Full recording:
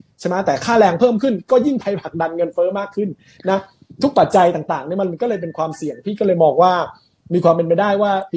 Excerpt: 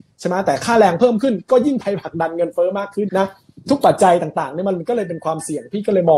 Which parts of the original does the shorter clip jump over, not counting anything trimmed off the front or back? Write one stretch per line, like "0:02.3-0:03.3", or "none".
0:03.1-0:03.4